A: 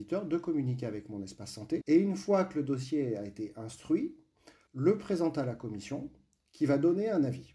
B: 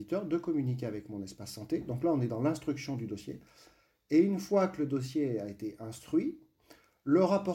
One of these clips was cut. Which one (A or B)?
A